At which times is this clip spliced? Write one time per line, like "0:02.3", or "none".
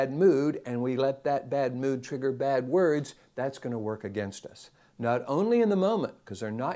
none